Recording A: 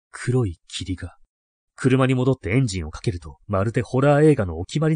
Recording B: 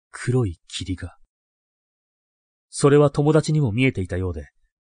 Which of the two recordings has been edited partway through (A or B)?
A